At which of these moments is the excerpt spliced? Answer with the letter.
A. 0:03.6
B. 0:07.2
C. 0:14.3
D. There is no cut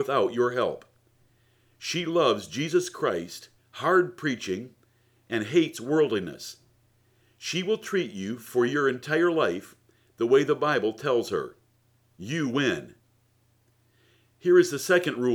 A